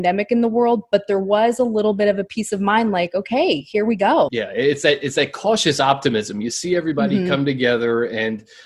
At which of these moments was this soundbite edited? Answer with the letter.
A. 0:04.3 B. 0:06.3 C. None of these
A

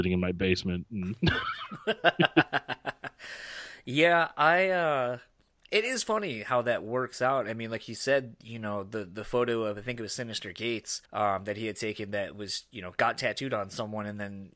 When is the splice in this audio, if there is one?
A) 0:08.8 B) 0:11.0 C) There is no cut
B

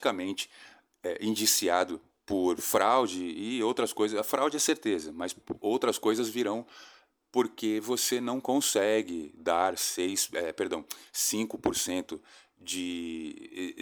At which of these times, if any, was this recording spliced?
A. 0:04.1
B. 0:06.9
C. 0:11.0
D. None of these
D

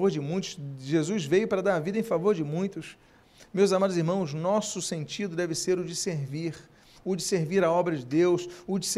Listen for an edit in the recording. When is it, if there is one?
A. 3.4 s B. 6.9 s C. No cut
B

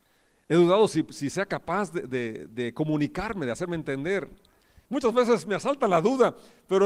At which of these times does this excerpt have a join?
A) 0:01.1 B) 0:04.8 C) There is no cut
B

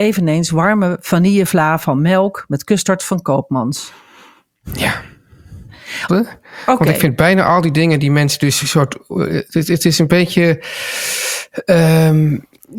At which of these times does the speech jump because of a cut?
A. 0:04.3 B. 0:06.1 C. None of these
B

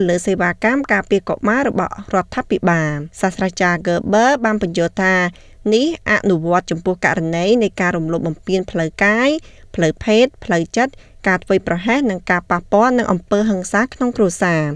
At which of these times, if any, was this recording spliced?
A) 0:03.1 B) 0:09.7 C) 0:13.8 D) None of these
A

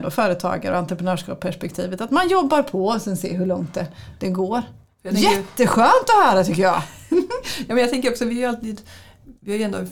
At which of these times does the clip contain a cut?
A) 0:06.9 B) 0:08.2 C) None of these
C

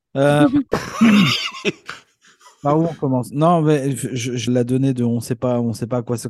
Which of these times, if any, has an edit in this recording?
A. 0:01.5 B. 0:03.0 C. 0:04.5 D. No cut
C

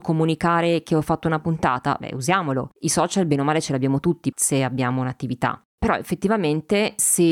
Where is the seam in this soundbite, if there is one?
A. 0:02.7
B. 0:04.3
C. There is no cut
B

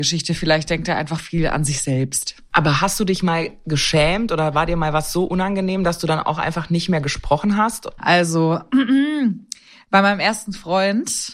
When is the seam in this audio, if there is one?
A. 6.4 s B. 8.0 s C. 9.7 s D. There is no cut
B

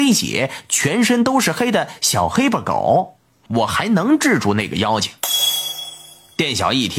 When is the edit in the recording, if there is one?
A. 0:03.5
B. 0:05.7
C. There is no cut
A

